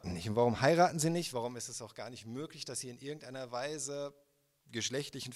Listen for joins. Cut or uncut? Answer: uncut